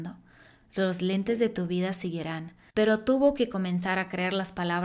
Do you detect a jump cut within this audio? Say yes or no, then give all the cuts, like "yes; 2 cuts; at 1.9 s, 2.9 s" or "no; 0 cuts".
yes; 1 cut; at 2.7 s